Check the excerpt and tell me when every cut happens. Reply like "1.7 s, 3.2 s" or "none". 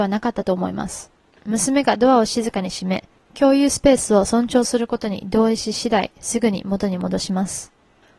1.4 s